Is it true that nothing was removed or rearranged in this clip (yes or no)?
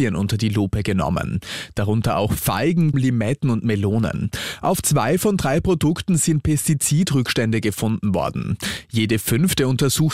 no